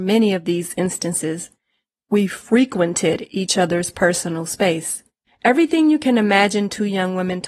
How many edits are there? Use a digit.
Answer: 1